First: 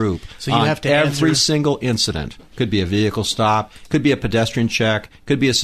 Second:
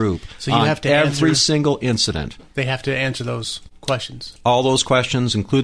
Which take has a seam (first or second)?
first